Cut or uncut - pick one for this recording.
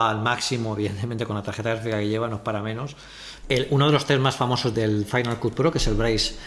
cut